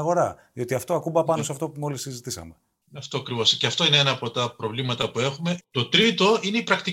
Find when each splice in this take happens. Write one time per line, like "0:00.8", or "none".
0:05.6